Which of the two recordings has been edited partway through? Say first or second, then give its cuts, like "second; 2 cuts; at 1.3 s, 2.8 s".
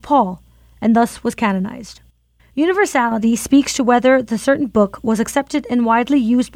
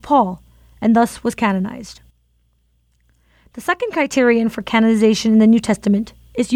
first; 1 cut; at 2.4 s